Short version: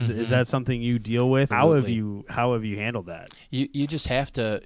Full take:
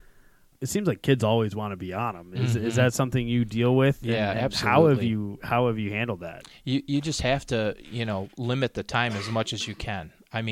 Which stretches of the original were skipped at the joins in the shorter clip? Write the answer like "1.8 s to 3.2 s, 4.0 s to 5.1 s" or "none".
4.0 s to 4.6 s